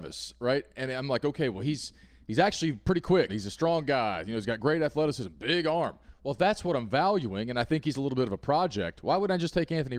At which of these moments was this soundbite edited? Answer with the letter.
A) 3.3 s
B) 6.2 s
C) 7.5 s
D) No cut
A